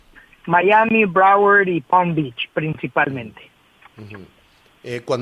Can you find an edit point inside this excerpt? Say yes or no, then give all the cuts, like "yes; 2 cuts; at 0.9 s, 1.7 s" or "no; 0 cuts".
no; 0 cuts